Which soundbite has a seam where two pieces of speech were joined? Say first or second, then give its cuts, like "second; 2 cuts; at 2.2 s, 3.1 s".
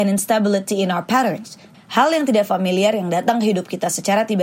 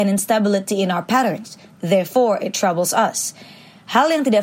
first; 1 cut; at 1.7 s